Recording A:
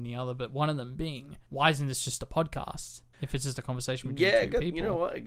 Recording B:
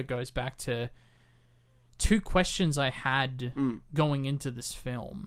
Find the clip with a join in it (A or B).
A